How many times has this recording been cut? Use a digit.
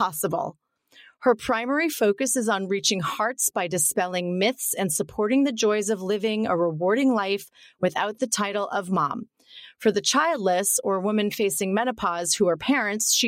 0